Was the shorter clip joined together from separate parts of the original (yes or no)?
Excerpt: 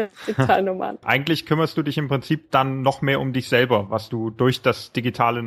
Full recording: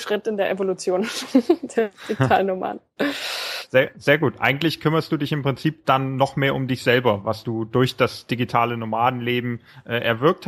yes